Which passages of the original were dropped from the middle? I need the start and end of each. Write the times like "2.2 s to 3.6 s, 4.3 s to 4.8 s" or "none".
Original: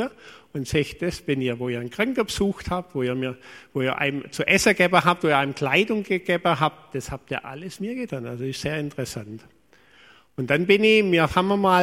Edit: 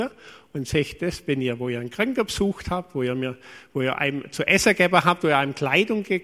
none